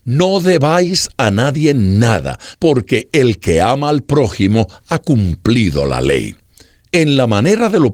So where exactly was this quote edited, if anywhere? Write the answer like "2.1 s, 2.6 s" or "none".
2.5 s